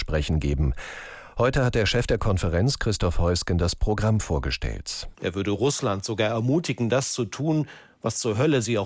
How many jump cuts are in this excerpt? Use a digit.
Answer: 1